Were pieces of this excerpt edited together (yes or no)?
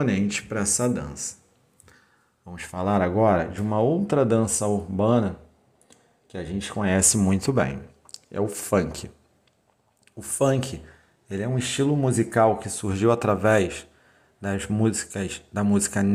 no